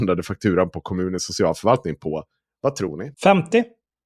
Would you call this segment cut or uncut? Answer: cut